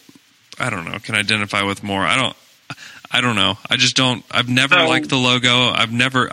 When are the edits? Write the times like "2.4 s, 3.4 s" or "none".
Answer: none